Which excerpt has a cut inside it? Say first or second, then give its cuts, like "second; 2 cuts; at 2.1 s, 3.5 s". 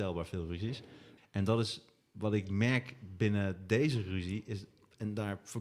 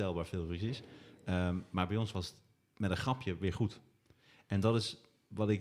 first; 1 cut; at 1.2 s